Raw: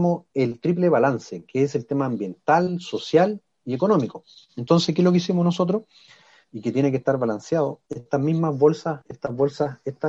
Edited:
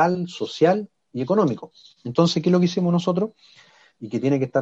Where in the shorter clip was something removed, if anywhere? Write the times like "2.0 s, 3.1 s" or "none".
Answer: none